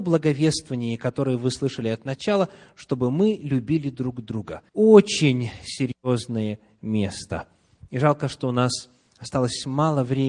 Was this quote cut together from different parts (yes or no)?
yes